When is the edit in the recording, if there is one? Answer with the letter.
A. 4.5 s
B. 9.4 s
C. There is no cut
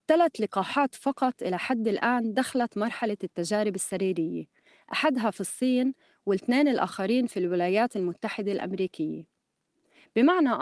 C